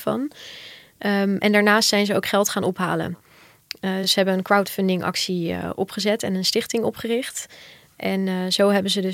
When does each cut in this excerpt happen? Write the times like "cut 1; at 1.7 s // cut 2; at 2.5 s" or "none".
none